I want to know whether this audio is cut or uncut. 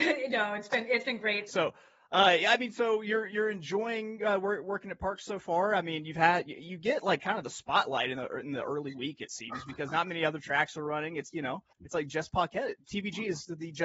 cut